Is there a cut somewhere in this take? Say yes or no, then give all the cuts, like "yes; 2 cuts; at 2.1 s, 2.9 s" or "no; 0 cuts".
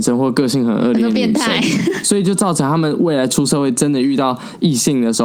no; 0 cuts